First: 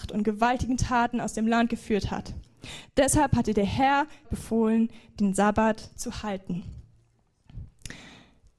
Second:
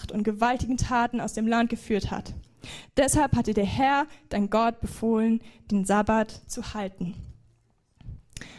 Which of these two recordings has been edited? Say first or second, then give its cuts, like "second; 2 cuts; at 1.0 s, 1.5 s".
first; 1 cut; at 4.2 s